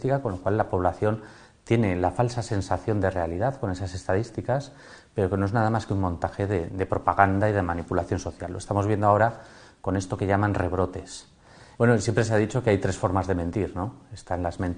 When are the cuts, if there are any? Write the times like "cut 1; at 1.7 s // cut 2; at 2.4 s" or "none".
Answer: cut 1; at 6.7 s // cut 2; at 11.7 s